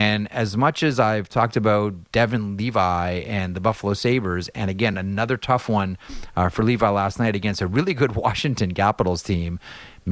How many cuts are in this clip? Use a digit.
0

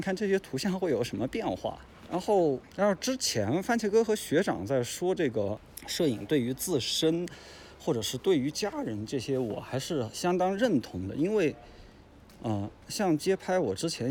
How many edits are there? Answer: 0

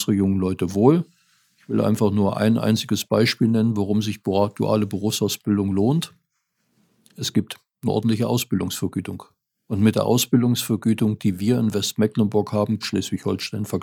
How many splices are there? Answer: 1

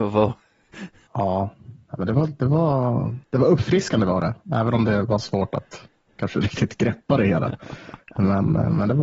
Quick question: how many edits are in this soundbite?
1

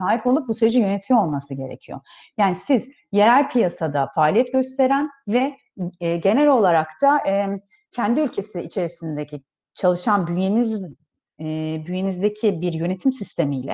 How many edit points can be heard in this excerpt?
0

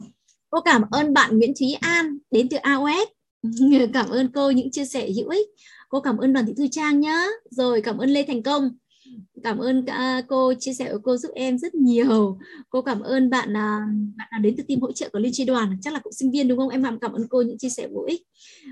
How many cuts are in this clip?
0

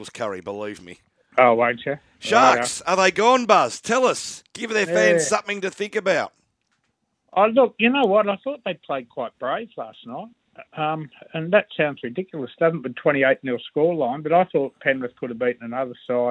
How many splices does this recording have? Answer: 0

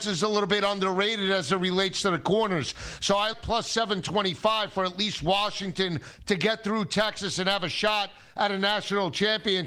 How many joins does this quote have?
1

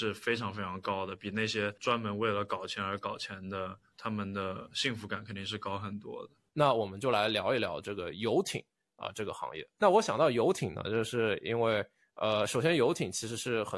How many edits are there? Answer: 1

